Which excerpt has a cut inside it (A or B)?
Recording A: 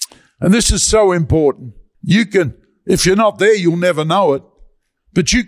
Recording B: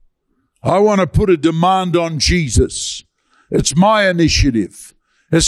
A